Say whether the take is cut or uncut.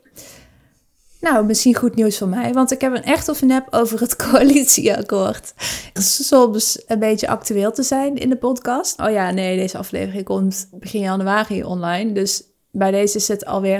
cut